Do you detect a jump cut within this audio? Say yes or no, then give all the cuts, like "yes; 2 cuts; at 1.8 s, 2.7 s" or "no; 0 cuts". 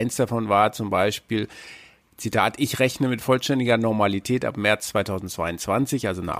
no; 0 cuts